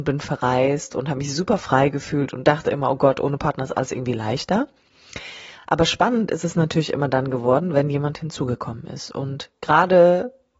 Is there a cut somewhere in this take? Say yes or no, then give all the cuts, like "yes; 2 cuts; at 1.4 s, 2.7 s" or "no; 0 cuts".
no; 0 cuts